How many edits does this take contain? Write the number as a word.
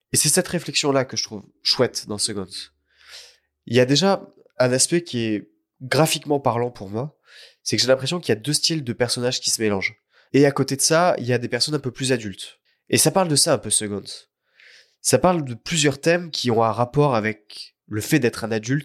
one